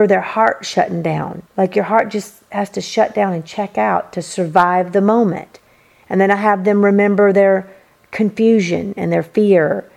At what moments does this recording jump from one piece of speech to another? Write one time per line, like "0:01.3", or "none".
0:01.5
0:06.0